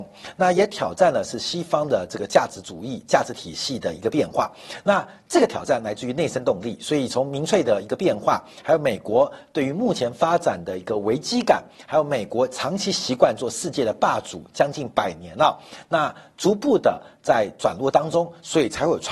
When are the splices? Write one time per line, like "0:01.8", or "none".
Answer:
none